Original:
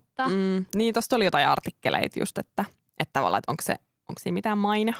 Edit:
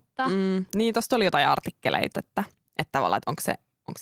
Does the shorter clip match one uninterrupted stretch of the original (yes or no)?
no